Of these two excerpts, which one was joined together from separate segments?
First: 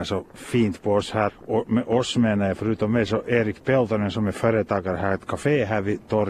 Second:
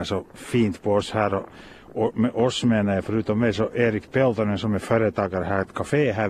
first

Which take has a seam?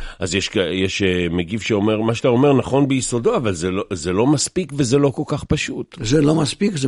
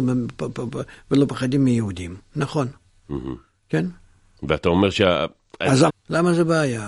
second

